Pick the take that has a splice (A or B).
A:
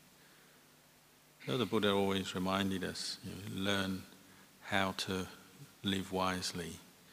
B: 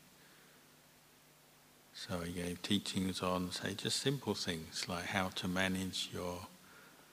A